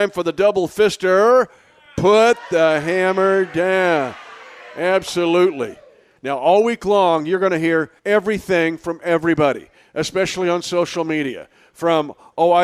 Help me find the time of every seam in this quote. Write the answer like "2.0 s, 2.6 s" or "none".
6.2 s, 8.0 s